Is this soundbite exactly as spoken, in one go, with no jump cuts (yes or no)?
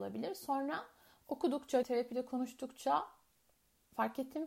no